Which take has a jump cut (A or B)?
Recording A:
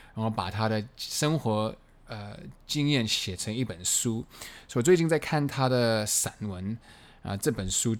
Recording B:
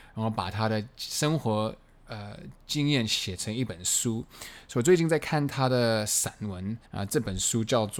B